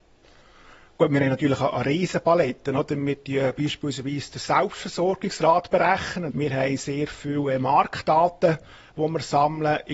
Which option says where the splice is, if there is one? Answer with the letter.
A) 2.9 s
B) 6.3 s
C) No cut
B